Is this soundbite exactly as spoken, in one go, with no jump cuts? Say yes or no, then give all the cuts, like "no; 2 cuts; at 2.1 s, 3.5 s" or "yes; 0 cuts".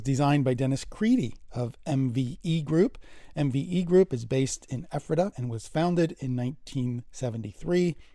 no; 1 cut; at 5.3 s